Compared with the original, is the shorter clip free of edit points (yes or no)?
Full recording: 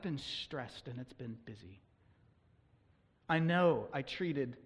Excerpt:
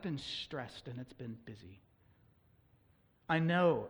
yes